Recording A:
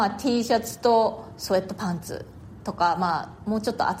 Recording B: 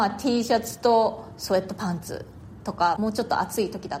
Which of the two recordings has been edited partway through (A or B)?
B